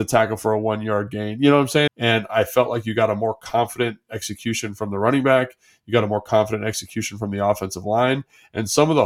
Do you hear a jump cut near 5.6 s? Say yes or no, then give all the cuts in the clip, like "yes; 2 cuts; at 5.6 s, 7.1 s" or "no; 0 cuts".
no; 1 cut; at 1.9 s